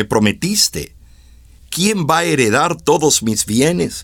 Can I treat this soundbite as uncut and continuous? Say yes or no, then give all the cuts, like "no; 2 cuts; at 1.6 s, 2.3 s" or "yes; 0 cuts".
yes; 0 cuts